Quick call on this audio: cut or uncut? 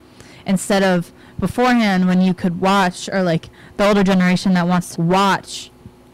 cut